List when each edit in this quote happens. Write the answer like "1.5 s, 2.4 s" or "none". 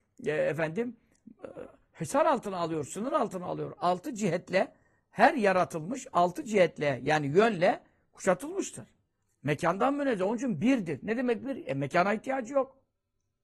9.2 s